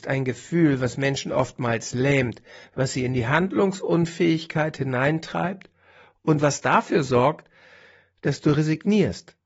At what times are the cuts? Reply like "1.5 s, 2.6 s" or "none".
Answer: none